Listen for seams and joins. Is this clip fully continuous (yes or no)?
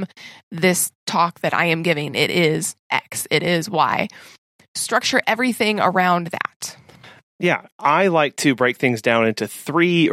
yes